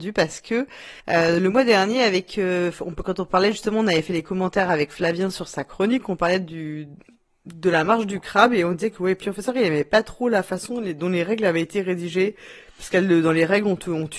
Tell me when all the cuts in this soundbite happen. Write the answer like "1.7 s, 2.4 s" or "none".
1.0 s